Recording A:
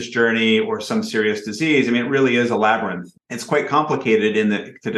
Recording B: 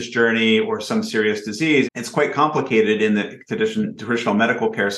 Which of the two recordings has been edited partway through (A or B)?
B